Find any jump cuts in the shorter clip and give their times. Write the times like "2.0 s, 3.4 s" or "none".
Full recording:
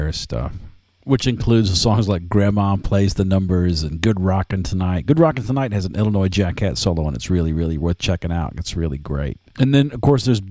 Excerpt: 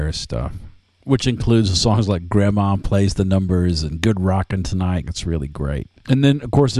5.0 s